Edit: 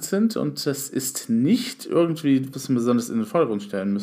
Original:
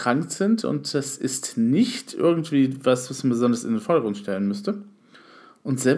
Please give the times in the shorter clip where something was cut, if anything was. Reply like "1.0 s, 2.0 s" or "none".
2.5 s